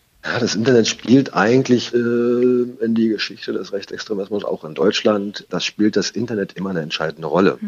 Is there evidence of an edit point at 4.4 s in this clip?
no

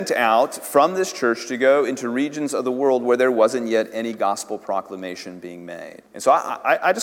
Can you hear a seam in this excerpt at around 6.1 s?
yes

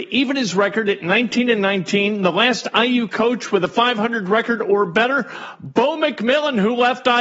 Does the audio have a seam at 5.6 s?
no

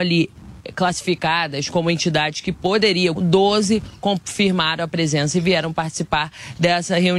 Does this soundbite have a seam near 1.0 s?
no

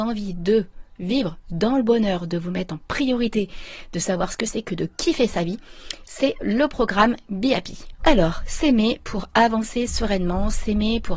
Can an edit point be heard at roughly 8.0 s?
yes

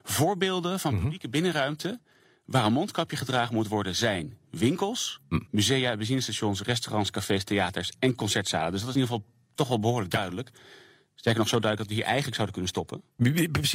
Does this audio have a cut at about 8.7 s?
no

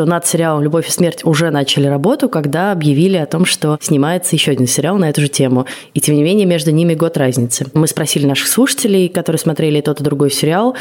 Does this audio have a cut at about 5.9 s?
no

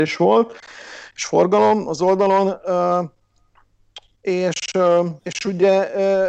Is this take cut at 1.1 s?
no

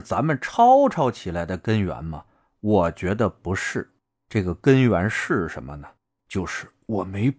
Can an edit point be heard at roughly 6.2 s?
yes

